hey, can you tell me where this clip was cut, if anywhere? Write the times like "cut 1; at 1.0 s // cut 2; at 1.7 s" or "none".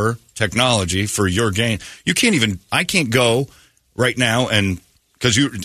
cut 1; at 2.7 s